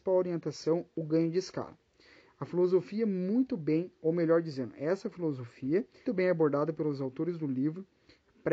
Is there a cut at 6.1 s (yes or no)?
yes